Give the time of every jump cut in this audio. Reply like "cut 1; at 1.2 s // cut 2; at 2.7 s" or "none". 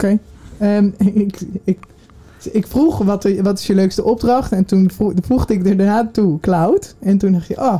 none

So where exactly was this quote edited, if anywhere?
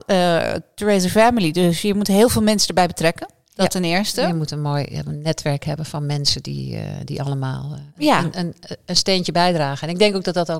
cut 1; at 7.9 s

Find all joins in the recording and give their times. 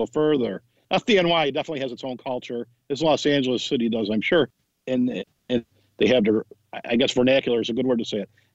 none

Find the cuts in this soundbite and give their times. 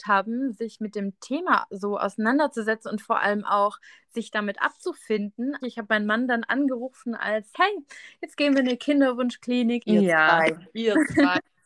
cut 1; at 5.6 s // cut 2; at 7.5 s // cut 3; at 9.8 s

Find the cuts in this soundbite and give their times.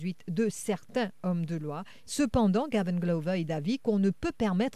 cut 1; at 2.0 s

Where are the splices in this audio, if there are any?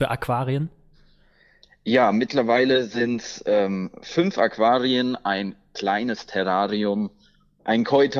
none

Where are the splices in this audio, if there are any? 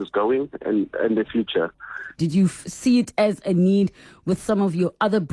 cut 1; at 2.2 s

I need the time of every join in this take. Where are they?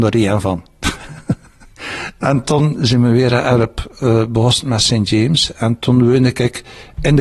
none

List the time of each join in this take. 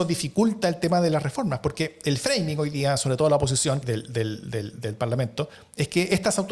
cut 1; at 3.8 s

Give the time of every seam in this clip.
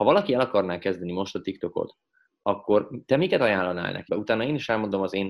cut 1; at 4.1 s

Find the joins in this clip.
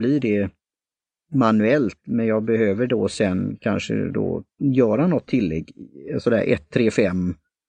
none

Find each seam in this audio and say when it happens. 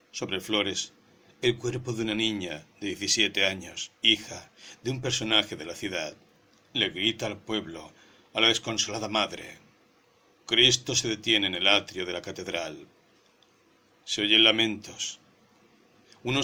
cut 1; at 4.0 s // cut 2; at 6.6 s // cut 3; at 10.4 s

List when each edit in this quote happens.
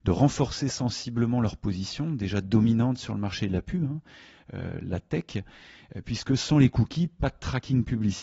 none

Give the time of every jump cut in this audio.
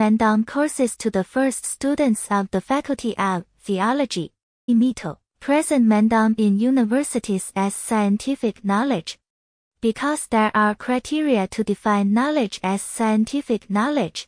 cut 1; at 4.7 s

